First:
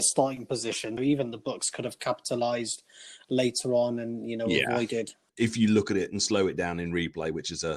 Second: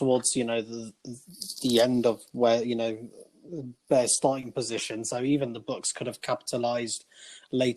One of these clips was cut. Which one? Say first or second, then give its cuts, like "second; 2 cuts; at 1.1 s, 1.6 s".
first; 2 cuts; at 1.0 s, 5.3 s